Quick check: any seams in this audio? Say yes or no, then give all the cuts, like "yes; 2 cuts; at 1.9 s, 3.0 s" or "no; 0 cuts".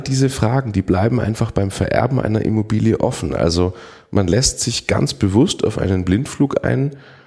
no; 0 cuts